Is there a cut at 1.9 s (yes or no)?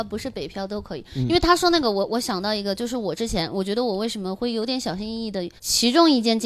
no